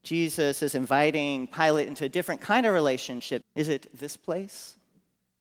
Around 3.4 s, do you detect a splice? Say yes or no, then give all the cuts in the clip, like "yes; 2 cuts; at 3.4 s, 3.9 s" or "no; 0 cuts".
yes; 1 cut; at 3.4 s